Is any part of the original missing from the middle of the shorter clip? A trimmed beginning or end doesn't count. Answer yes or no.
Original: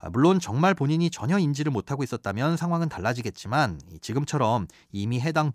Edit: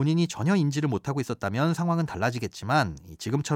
no